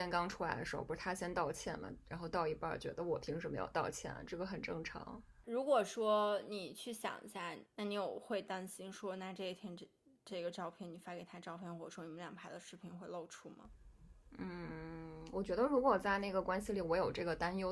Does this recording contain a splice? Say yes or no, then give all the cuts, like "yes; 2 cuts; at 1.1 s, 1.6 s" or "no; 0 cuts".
yes; 1 cut; at 7.6 s